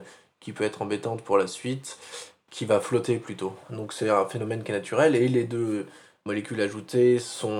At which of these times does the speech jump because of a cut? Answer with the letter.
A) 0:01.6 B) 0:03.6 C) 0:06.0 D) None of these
B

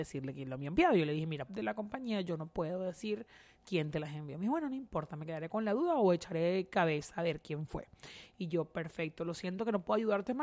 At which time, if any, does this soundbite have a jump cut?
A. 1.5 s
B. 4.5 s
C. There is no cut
A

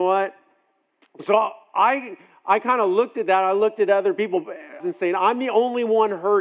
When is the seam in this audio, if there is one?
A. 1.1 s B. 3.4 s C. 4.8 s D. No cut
C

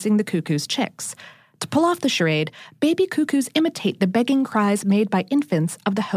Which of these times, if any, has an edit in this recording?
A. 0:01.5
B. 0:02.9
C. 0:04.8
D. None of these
D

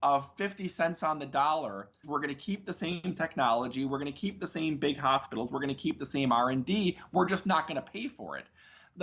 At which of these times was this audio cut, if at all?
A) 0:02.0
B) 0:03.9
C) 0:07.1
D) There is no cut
A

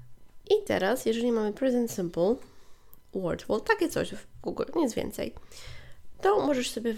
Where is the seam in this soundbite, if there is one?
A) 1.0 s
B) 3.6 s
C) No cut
C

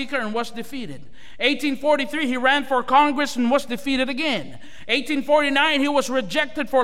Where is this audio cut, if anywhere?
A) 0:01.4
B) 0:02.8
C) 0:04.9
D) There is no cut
D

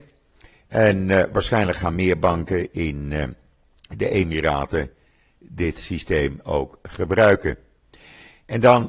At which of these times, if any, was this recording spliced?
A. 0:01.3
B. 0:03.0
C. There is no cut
C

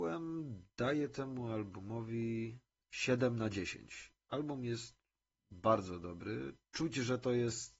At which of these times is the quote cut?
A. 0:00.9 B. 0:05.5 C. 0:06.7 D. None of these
C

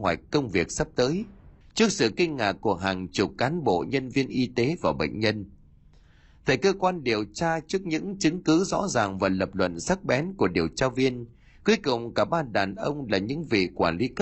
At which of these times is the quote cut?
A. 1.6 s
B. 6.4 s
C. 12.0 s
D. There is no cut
A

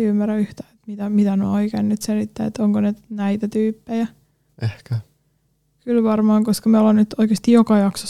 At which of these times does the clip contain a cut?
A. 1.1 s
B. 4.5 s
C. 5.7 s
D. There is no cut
B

